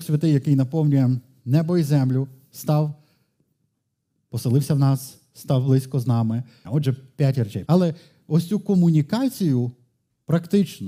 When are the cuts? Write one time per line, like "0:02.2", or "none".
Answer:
0:06.6
0:07.6